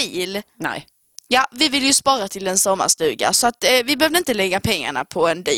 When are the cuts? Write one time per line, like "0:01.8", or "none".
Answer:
none